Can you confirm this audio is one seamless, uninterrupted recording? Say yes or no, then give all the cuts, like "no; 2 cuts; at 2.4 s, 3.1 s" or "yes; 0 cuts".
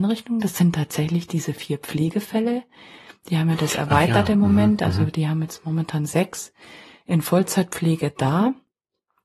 yes; 0 cuts